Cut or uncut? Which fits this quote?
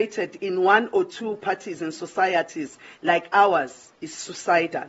cut